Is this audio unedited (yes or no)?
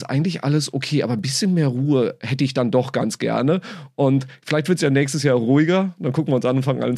yes